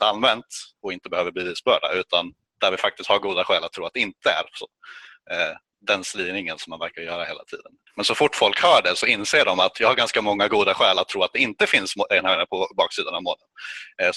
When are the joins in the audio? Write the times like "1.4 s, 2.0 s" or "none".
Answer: 5.7 s, 7.9 s